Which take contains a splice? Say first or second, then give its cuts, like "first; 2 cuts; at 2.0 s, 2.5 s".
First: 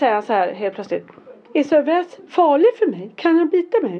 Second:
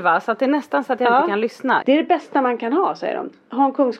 second; 1 cut; at 1.8 s